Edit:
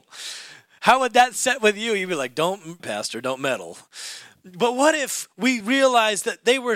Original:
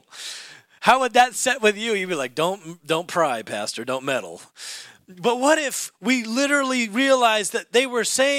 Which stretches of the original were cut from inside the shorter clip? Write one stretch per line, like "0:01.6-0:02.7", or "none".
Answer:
0:02.8-0:03.4
0:06.2-0:06.9